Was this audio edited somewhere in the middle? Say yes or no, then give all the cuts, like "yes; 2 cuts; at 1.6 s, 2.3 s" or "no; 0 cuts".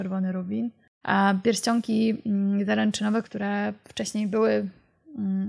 yes; 2 cuts; at 1.0 s, 3.2 s